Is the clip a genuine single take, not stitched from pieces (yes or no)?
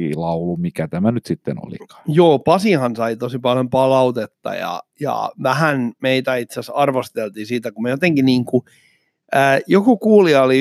yes